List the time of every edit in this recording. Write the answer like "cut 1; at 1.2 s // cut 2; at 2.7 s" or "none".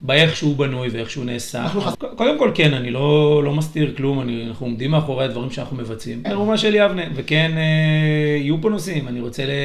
cut 1; at 1.9 s // cut 2; at 6.2 s